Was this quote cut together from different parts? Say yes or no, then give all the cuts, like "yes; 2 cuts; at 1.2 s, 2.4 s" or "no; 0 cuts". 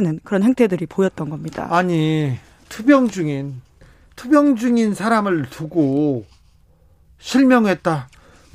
no; 0 cuts